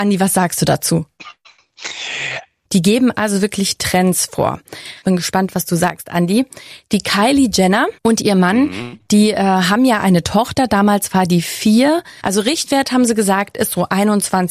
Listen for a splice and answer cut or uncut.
cut